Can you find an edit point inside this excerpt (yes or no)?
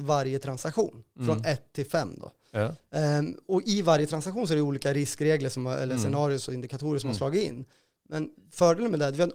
no